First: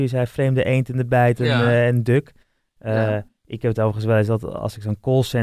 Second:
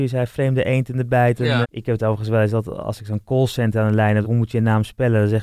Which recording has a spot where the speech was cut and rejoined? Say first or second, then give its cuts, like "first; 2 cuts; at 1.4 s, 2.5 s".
second; 2 cuts; at 1.6 s, 4.2 s